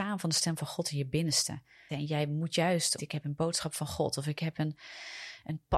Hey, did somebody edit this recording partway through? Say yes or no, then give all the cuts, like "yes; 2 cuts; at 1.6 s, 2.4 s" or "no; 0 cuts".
yes; 2 cuts; at 1.9 s, 3.0 s